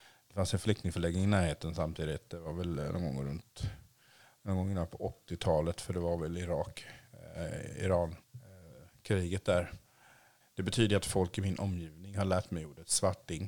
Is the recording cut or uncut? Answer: cut